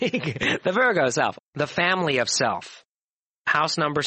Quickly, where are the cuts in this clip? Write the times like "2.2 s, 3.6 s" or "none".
1.4 s